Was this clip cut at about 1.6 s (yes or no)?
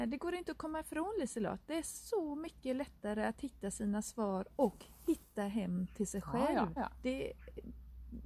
no